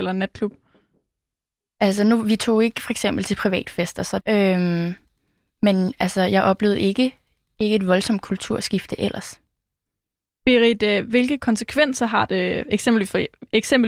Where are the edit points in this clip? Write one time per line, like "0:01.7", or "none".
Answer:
0:04.2